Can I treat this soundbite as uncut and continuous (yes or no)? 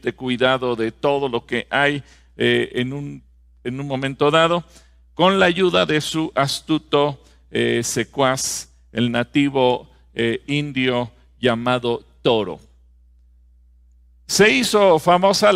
yes